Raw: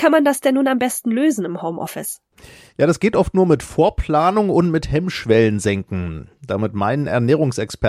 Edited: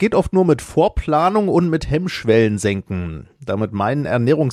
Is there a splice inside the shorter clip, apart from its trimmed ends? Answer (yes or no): no